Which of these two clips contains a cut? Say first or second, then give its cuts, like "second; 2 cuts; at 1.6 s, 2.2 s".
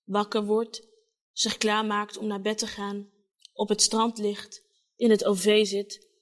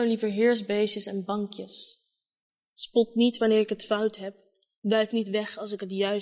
second; 1 cut; at 2.6 s